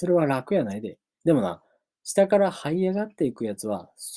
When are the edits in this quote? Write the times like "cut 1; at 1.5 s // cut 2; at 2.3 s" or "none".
cut 1; at 1.2 s